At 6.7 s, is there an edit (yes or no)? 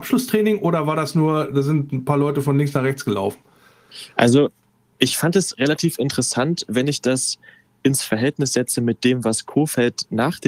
no